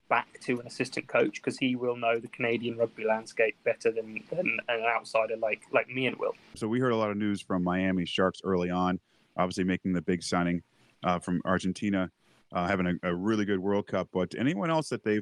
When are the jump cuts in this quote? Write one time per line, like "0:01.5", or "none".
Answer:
none